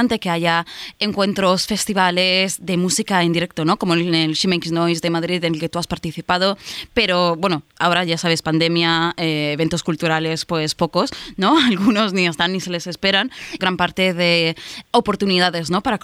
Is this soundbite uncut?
no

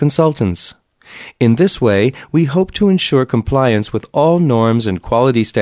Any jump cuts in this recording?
no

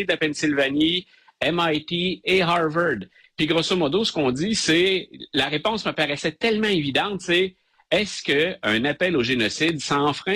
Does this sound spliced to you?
no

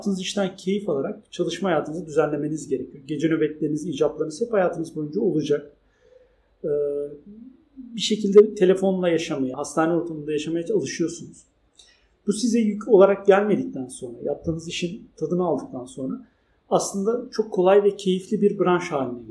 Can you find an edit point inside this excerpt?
yes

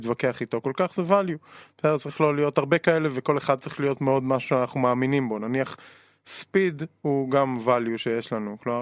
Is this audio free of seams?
yes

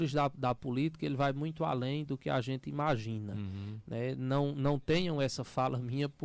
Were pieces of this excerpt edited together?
no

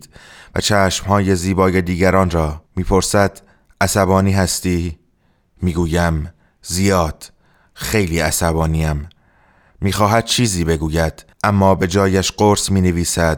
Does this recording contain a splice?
yes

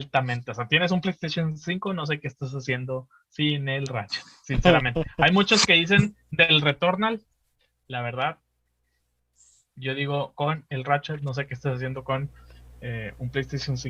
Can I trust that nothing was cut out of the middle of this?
yes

